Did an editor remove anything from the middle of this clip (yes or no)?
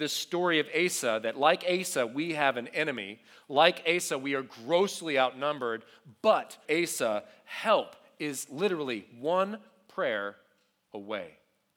yes